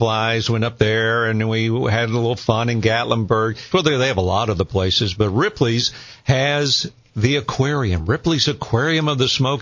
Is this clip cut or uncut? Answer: cut